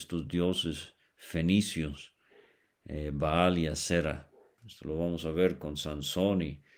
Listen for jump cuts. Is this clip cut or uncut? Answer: cut